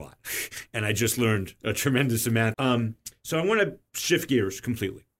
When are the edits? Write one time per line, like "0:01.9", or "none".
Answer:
0:02.5